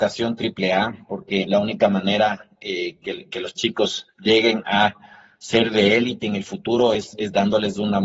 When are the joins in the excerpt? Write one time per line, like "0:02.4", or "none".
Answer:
none